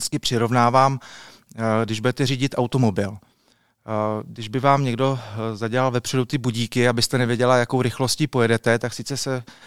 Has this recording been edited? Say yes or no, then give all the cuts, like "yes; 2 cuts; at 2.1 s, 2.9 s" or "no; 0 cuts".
no; 0 cuts